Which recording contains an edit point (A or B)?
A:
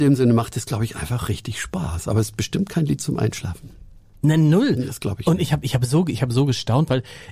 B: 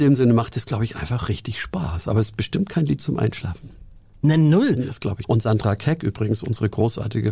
B